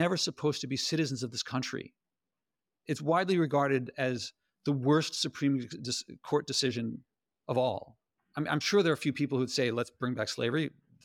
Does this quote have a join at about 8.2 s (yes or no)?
yes